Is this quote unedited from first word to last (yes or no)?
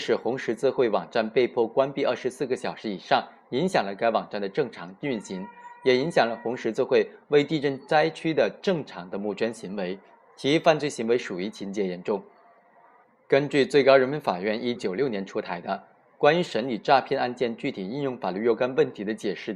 no